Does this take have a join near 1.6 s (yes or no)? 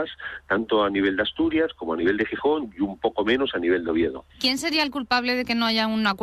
no